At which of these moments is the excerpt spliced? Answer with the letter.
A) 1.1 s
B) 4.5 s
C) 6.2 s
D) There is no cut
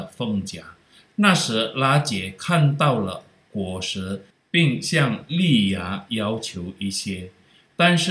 A